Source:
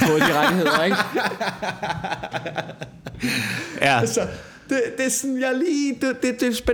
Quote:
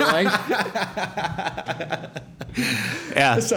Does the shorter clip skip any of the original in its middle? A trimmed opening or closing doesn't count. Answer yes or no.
no